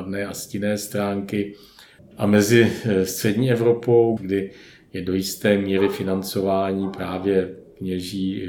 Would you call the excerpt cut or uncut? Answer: cut